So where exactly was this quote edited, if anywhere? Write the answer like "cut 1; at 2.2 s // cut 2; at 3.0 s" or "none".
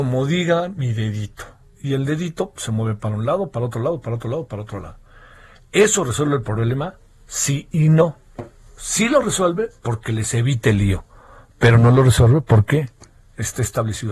none